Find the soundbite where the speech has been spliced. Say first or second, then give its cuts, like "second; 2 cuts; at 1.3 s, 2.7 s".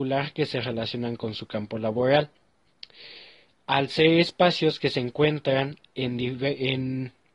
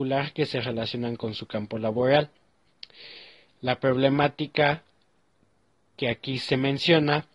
first; 1 cut; at 3.5 s